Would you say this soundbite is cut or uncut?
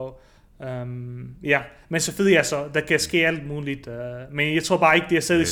uncut